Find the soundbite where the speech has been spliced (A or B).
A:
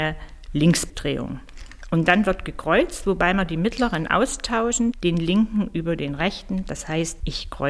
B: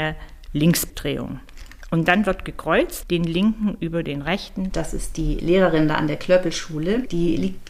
B